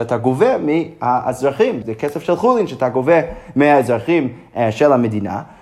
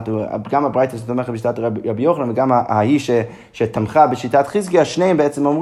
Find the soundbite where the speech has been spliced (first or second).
first